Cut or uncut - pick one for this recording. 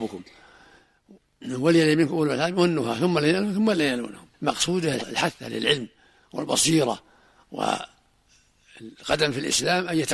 cut